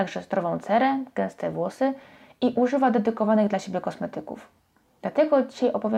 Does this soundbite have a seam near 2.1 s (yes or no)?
no